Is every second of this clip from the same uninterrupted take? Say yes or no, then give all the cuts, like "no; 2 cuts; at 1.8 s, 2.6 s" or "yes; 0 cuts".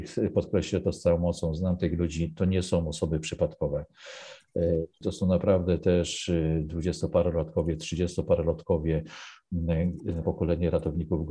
no; 2 cuts; at 5.0 s, 10.2 s